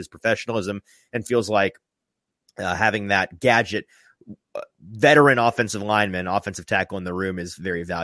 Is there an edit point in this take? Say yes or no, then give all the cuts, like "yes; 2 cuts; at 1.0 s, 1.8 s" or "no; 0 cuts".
no; 0 cuts